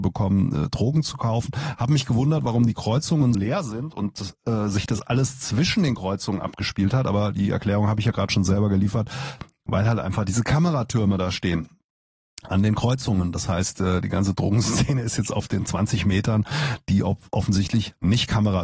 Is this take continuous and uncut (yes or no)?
no